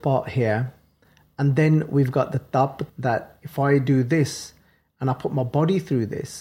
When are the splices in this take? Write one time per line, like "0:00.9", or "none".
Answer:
0:02.9

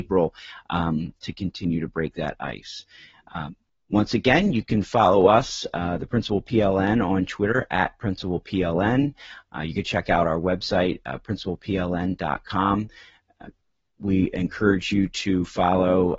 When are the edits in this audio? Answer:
none

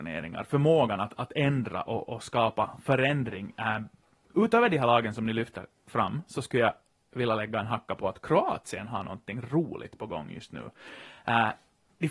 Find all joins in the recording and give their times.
0:02.1

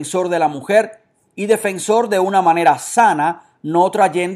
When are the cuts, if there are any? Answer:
none

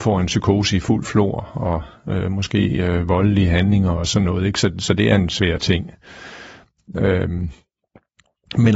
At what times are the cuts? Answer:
none

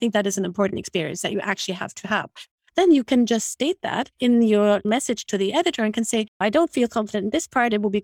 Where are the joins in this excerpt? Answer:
0:02.7

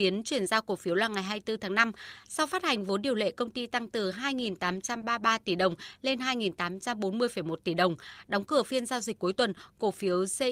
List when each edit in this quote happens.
none

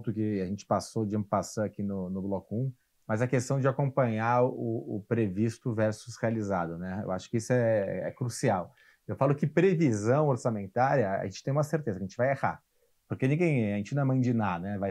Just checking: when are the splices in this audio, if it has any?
none

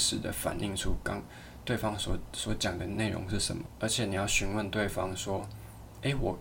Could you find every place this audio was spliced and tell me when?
none

